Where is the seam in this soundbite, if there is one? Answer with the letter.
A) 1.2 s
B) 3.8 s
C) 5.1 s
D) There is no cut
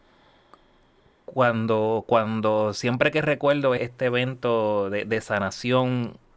B